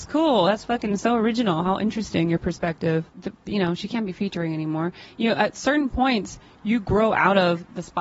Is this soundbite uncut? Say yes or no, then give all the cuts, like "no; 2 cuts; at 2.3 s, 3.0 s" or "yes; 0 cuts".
no; 1 cut; at 3.1 s